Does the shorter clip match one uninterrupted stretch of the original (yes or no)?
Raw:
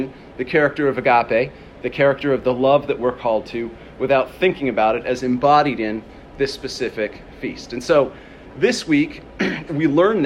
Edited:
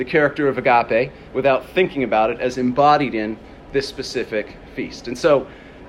no